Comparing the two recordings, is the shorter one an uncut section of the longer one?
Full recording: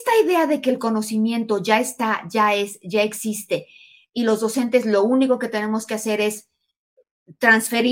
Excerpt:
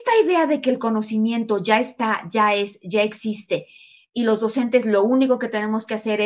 yes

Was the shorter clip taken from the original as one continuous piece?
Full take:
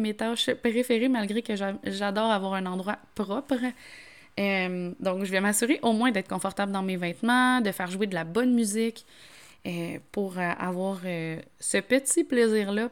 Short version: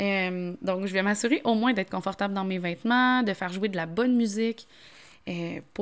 yes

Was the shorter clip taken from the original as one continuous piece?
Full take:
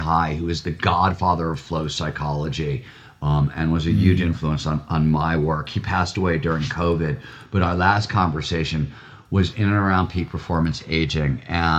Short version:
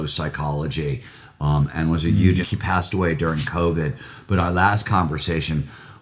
no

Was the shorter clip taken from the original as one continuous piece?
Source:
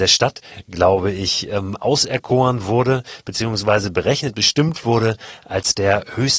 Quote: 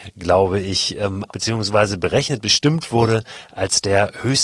no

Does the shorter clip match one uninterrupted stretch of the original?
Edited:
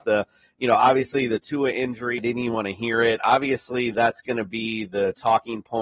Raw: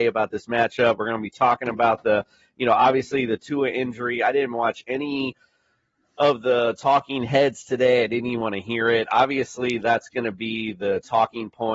no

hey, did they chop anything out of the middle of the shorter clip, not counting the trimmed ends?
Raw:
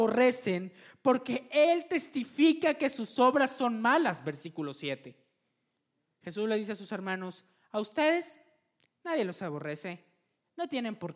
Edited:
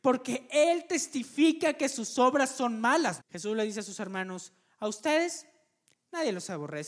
yes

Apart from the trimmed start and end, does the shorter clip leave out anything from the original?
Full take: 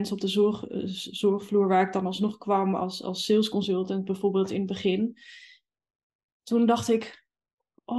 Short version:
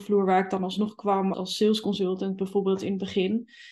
yes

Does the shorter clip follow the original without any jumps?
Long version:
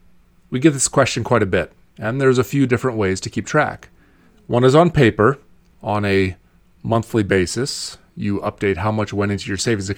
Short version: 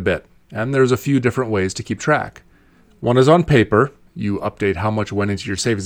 no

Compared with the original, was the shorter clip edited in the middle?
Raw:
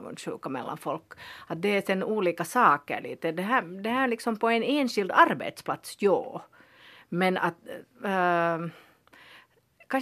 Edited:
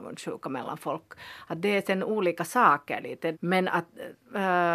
yes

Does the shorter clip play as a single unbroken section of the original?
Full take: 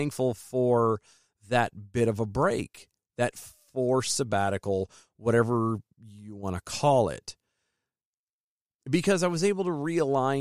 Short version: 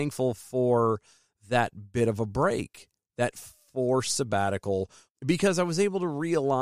no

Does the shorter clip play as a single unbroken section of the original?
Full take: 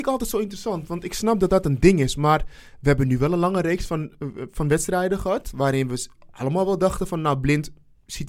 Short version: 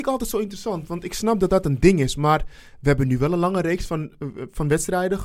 yes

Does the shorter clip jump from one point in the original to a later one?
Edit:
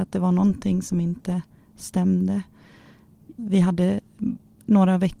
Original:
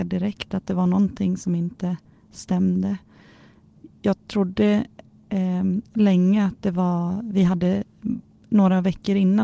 yes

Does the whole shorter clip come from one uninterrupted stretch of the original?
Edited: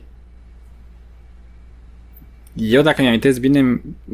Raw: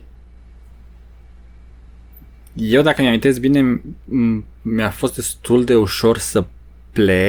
yes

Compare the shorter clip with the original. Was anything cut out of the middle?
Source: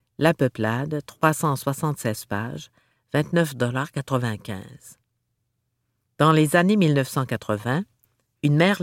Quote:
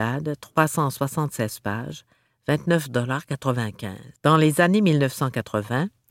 yes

